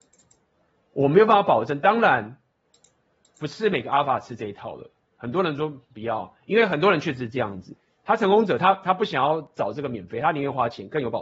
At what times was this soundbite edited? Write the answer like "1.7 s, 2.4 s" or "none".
none